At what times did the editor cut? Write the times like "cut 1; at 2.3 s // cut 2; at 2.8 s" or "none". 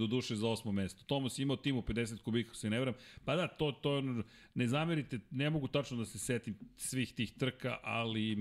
none